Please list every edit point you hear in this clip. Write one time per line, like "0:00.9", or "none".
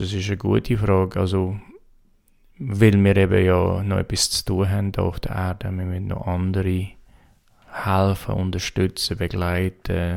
none